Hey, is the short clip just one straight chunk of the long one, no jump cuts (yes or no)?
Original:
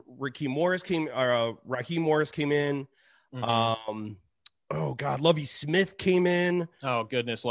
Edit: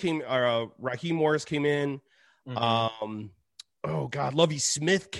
yes